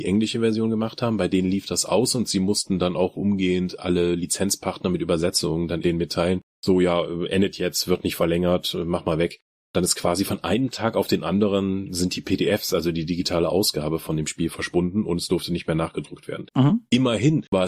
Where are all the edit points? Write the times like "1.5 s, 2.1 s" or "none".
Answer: 5.8 s